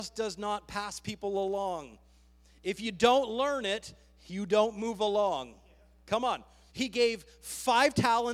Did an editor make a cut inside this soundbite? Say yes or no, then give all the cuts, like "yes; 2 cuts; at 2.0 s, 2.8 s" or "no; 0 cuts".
yes; 1 cut; at 6.7 s